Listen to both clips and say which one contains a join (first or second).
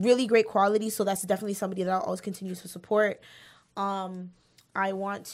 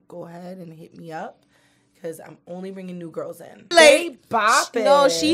second